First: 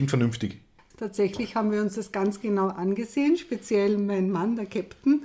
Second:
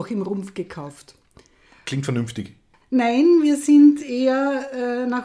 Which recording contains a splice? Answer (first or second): second